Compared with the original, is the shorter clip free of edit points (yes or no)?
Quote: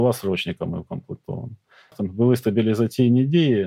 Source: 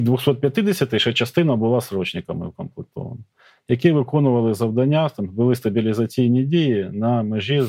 no